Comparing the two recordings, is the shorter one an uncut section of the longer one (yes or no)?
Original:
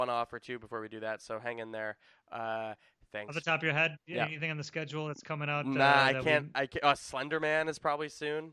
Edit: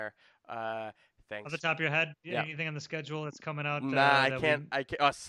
yes